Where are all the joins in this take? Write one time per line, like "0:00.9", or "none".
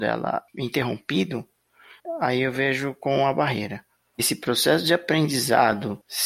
0:04.1